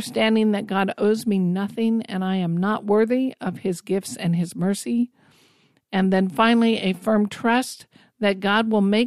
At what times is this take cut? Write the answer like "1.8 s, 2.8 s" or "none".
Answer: none